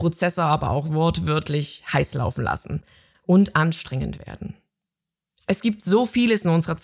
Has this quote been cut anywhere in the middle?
no; 0 cuts

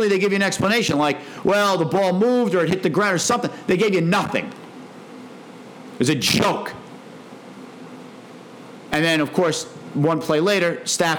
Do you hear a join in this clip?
no; 0 cuts

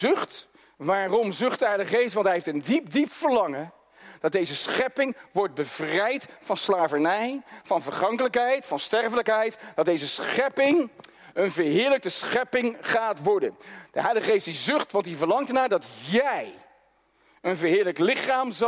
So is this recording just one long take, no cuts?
yes; 0 cuts

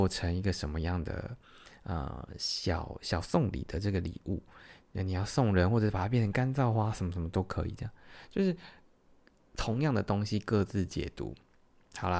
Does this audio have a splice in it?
no; 0 cuts

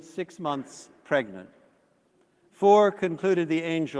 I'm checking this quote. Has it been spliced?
no; 0 cuts

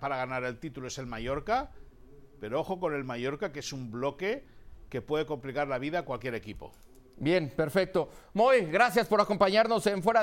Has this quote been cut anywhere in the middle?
no; 0 cuts

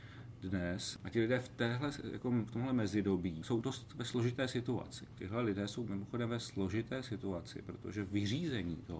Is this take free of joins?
no; 2 cuts; at 1.0 s, 5.2 s

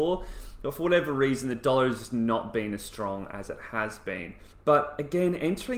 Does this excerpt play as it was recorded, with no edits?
no; 1 cut; at 4.5 s

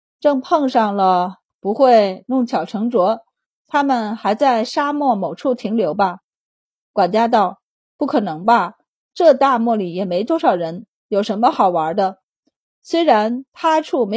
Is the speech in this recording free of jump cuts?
no; 1 cut; at 1.5 s

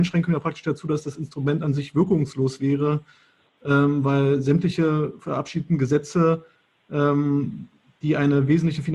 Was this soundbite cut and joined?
no; 0 cuts

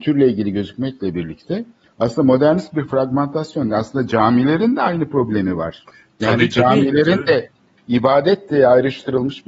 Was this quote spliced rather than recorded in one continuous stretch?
no; 0 cuts

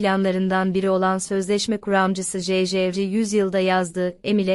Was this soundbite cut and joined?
yes; 1 cut; at 2.9 s

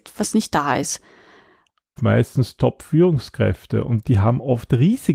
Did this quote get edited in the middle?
yes; 1 cut; at 2.0 s

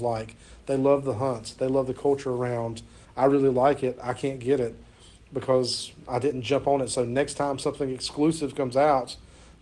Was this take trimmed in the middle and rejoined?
yes; 1 cut; at 3.0 s

